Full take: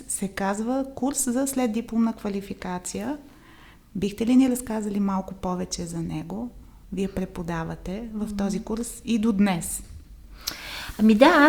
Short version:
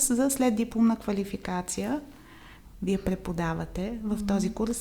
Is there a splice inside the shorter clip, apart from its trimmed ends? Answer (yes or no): yes